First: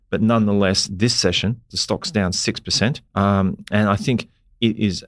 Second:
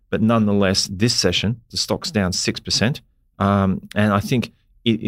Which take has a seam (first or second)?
first